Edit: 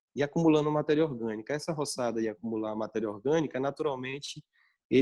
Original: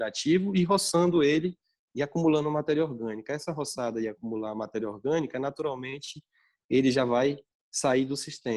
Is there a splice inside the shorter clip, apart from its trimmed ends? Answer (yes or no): no